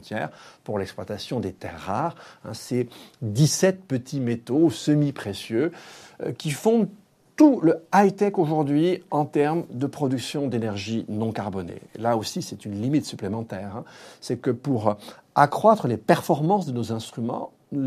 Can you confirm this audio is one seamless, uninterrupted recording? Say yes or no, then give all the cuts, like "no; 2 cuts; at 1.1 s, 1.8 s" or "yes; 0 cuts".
yes; 0 cuts